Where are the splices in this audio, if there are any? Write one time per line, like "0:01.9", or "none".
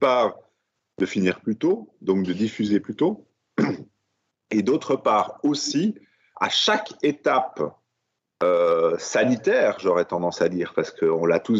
0:06.3

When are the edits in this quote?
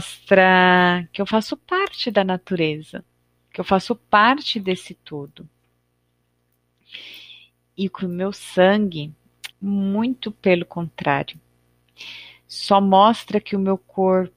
0:09.5

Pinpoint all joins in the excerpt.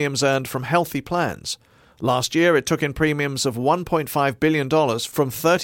none

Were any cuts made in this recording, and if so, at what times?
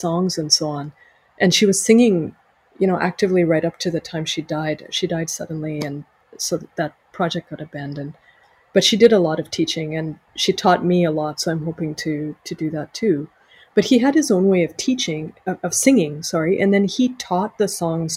none

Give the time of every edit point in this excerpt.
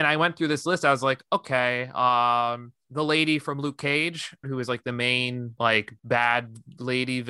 0:04.4

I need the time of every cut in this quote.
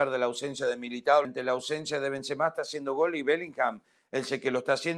0:01.2

